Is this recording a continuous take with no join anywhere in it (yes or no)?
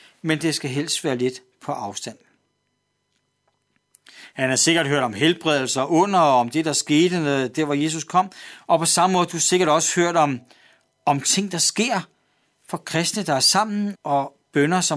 no